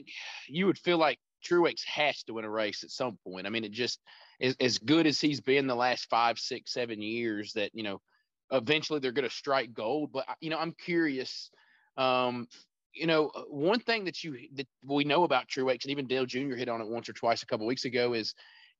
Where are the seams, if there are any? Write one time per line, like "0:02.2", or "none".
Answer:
none